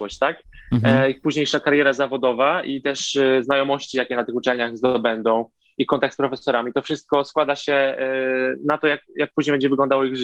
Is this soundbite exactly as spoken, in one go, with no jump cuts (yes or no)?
yes